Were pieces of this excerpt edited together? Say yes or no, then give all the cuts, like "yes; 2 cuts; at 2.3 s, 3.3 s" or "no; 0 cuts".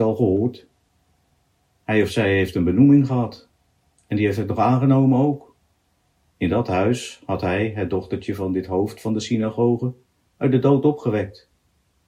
yes; 1 cut; at 6.3 s